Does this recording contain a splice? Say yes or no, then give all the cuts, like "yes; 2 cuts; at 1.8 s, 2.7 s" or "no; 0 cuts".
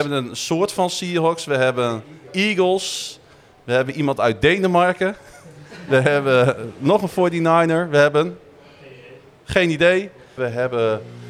yes; 1 cut; at 10.4 s